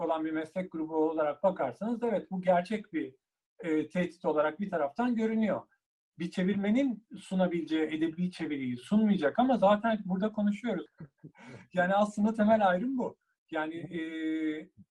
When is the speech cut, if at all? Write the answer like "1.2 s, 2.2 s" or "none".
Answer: 10.9 s